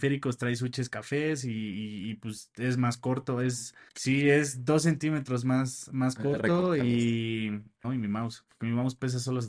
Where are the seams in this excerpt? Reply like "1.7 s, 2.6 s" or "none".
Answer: 3.9 s, 7.8 s